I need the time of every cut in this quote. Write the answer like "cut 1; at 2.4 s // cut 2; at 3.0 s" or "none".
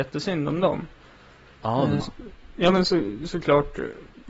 cut 1; at 2.0 s